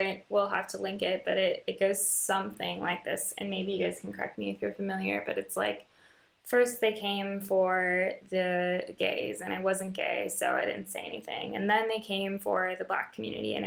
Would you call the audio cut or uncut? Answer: uncut